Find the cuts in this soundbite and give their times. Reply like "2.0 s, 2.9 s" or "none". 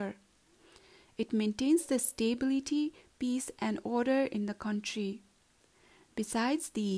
none